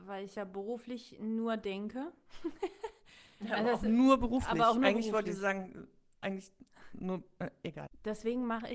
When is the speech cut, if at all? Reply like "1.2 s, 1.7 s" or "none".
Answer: none